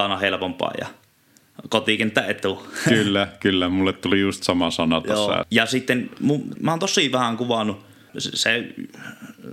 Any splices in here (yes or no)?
yes